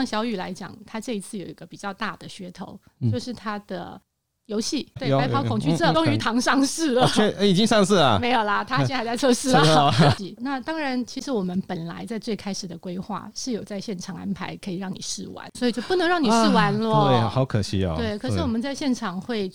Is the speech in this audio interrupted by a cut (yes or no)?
yes